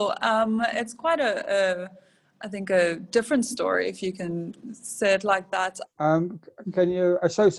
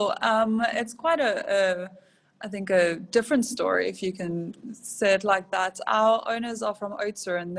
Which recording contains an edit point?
first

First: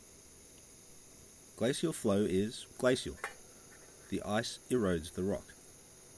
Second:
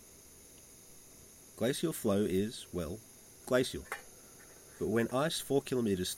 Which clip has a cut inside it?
first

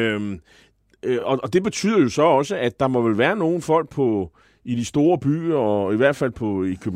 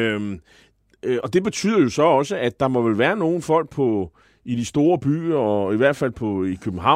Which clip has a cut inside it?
second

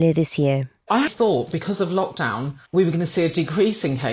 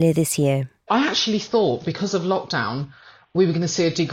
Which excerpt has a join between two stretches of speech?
first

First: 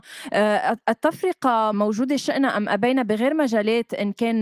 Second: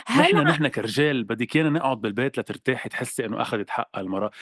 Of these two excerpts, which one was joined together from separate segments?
first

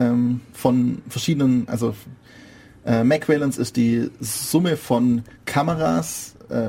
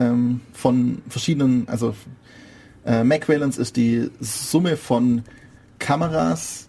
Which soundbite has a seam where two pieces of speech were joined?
first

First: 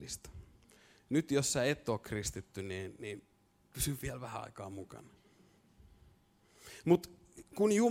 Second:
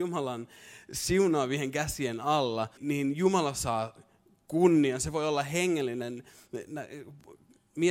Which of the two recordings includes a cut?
second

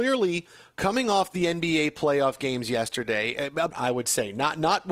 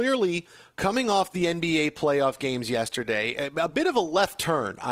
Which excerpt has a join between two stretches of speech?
first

